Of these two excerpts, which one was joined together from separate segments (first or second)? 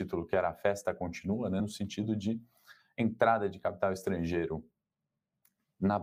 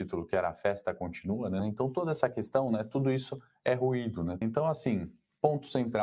second